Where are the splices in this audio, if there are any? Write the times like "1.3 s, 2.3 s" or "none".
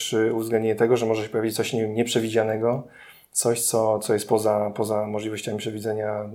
none